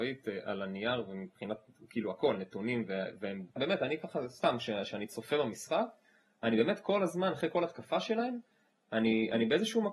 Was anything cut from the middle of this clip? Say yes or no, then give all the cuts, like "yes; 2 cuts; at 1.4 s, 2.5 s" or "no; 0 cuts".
yes; 1 cut; at 3.6 s